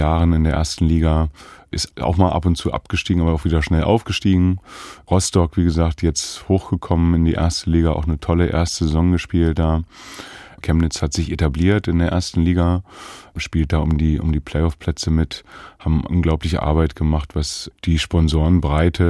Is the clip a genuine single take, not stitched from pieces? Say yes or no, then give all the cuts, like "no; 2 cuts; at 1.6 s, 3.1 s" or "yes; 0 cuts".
no; 1 cut; at 10.6 s